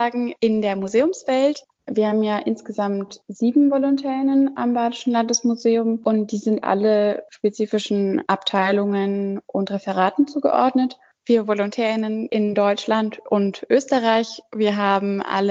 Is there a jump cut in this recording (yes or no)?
no